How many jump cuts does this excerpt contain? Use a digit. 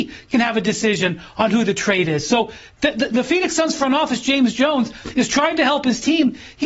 0